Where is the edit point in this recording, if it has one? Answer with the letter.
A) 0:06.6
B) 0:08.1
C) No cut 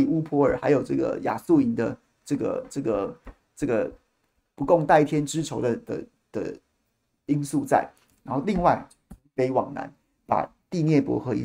C